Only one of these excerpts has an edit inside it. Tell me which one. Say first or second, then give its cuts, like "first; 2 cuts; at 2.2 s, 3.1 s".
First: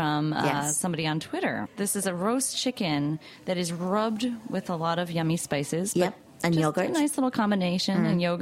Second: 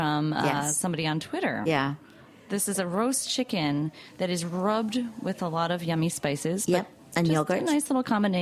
first; 1 cut; at 1.7 s